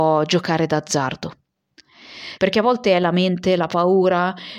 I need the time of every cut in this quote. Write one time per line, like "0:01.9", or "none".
0:02.4